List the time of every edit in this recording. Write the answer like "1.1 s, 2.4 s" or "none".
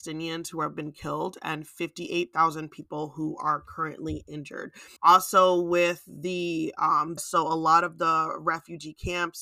5.0 s, 7.2 s